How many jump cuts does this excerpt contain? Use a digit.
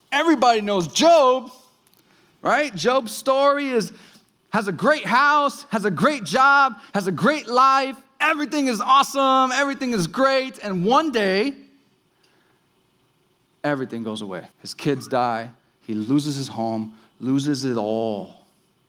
3